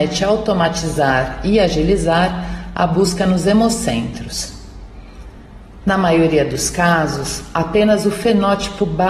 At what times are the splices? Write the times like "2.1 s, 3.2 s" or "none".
5.8 s